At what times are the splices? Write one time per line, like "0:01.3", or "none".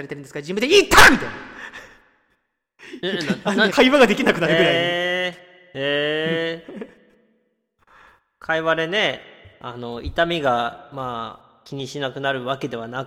0:03.7